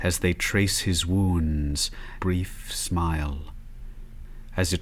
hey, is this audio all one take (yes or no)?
no